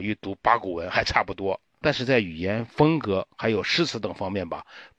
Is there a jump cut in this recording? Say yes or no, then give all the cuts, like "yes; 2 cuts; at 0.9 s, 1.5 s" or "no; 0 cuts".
yes; 1 cut; at 1.8 s